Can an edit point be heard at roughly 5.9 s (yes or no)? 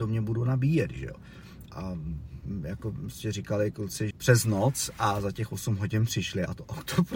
no